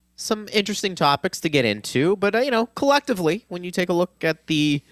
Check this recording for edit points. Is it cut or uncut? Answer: uncut